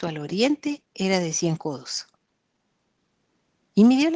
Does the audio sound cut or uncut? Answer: uncut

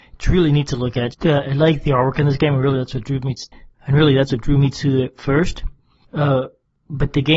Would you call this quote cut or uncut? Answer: cut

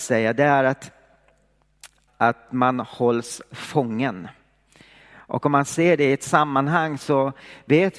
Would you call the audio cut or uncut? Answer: cut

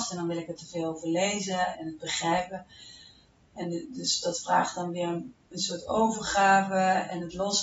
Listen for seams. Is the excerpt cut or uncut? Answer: cut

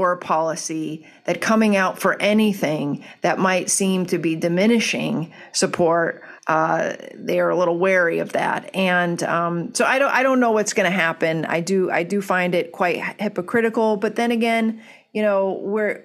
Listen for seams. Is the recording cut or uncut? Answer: cut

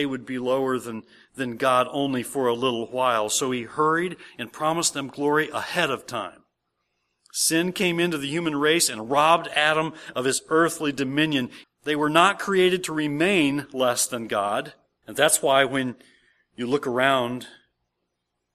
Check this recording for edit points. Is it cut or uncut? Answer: cut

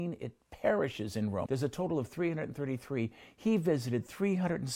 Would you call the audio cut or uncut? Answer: cut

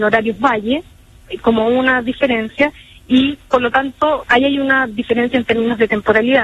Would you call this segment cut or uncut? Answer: cut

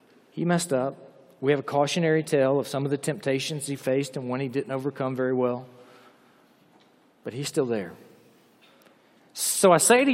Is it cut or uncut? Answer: uncut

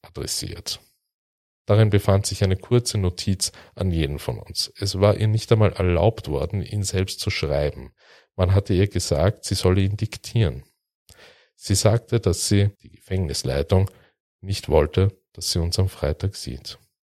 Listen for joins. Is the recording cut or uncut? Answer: uncut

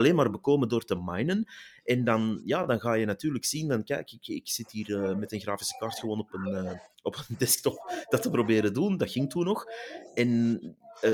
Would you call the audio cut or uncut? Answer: uncut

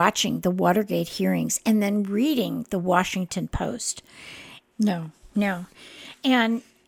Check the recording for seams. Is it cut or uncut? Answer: cut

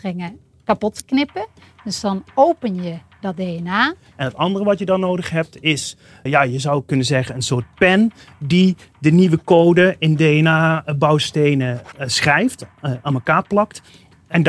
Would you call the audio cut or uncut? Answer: cut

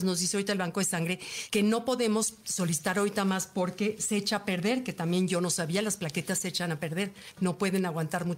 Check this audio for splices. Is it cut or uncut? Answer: uncut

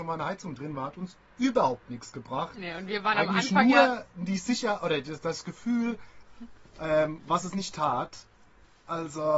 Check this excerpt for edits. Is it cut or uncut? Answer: cut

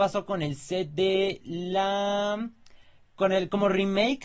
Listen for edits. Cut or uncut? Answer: uncut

